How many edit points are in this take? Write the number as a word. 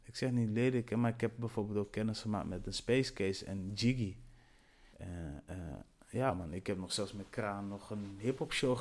one